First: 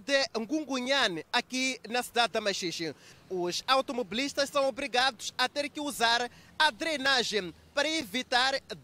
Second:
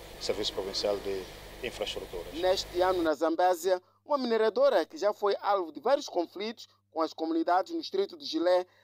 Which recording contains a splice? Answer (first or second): first